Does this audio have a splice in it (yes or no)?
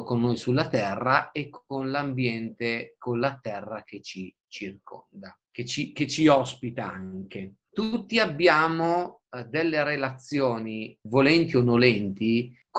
yes